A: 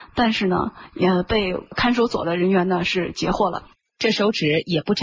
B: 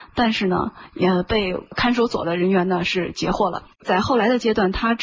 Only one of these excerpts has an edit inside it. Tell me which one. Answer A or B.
B